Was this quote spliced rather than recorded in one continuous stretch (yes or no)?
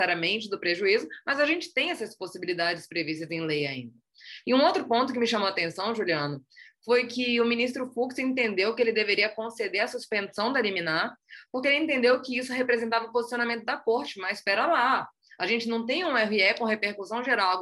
yes